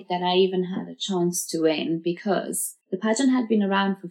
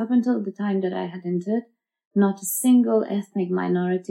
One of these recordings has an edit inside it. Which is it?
first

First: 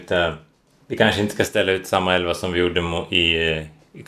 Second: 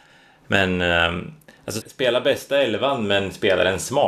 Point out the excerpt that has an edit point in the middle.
second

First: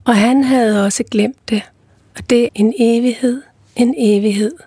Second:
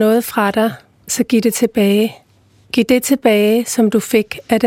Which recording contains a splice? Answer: first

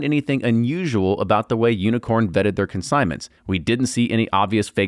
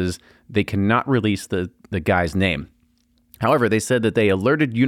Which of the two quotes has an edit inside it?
first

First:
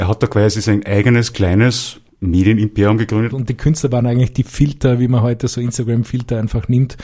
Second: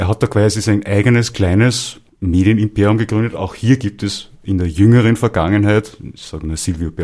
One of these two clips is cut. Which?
first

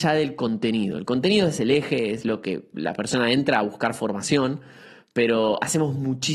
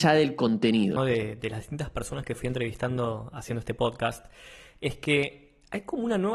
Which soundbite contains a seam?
second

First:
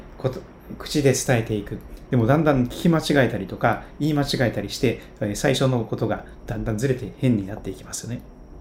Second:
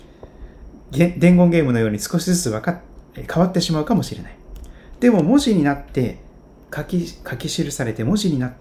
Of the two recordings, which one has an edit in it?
first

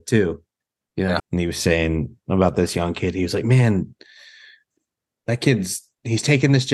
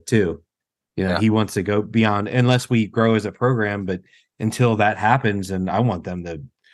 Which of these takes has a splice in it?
first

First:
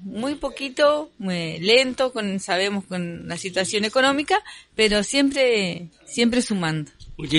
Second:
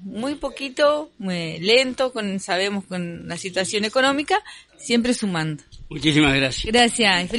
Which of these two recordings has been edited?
second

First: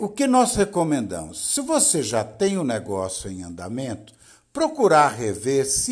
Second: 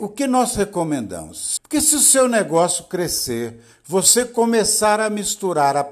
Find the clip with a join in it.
second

